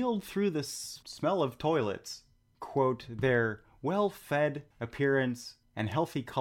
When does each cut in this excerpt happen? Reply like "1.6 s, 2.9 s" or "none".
none

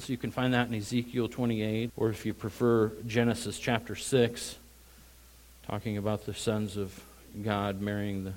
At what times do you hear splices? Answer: 1.9 s

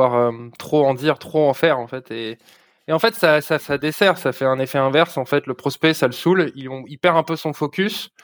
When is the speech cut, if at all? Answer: 3.6 s

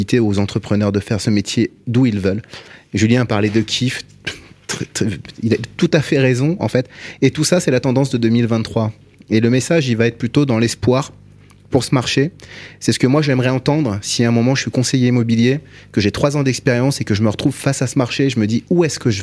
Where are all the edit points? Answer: none

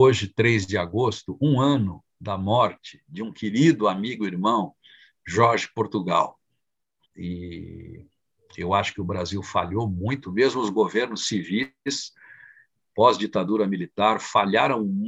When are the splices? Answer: 7.0 s

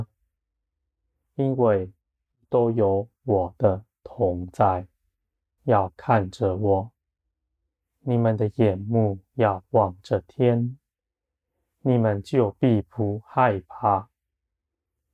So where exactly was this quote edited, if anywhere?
5.6 s

